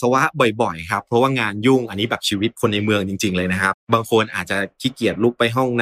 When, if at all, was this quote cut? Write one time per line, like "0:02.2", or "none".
0:03.7